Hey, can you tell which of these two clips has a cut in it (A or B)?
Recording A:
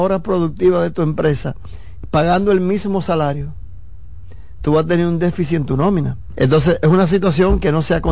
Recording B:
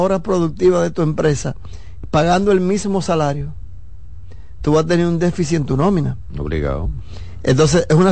A